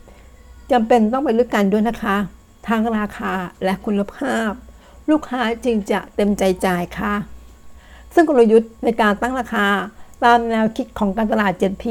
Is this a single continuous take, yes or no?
no